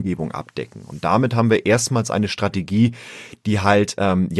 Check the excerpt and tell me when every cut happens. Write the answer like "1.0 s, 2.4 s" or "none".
none